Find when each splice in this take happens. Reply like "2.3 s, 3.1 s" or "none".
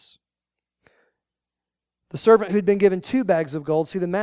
none